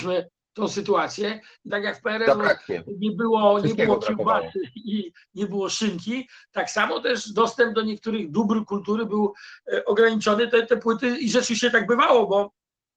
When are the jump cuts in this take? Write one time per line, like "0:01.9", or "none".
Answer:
0:01.7